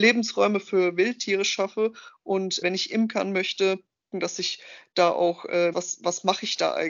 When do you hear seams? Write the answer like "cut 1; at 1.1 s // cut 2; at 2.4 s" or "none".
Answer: cut 1; at 2.6 s // cut 2; at 4.1 s // cut 3; at 5.7 s